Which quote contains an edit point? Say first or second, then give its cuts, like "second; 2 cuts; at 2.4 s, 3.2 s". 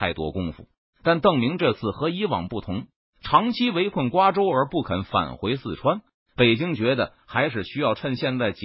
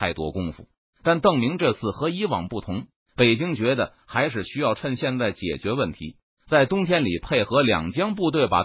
second; 1 cut; at 3.0 s